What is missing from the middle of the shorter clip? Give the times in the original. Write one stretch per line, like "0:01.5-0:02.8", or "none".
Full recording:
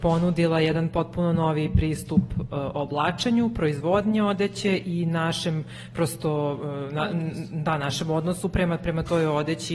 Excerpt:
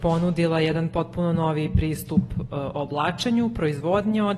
none